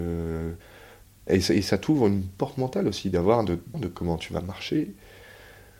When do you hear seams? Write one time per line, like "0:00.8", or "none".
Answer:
0:01.3
0:03.7